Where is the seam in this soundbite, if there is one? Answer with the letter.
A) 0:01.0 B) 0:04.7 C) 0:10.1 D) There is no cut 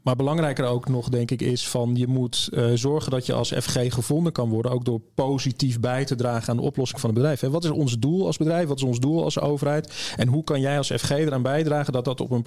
D